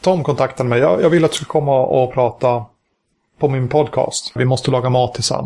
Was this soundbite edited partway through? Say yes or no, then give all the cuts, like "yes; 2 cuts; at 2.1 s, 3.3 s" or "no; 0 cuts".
yes; 1 cut; at 4.4 s